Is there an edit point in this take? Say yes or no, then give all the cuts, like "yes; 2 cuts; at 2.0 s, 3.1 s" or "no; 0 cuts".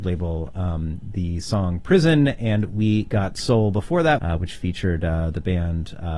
yes; 1 cut; at 4.2 s